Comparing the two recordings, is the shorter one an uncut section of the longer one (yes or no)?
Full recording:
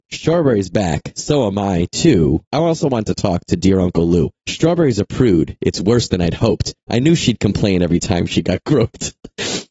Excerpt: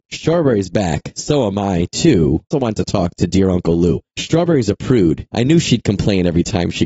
no